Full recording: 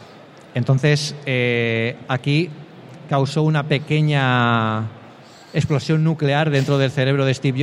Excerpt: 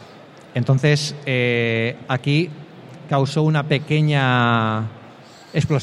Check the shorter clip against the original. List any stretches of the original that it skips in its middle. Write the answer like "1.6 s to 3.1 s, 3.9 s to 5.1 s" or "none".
none